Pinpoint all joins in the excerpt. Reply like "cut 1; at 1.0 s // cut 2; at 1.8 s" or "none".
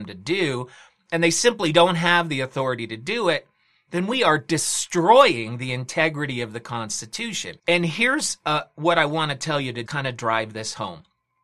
cut 1; at 7.6 s // cut 2; at 9.9 s